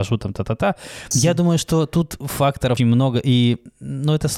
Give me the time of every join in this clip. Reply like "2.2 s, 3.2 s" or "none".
1.1 s, 2.8 s